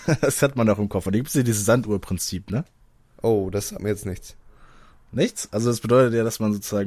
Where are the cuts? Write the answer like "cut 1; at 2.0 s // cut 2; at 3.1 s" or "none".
none